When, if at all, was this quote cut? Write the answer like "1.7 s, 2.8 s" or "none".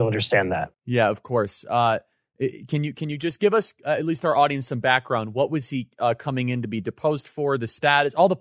none